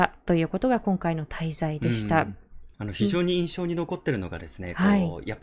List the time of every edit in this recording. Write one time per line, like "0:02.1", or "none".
0:02.7